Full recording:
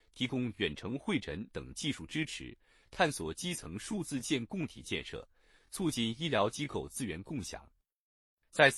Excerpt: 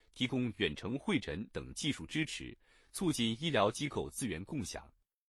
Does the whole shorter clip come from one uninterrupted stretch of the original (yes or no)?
no